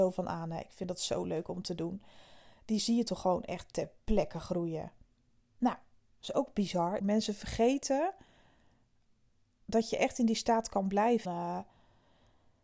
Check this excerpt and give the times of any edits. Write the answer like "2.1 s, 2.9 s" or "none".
7.0 s, 11.2 s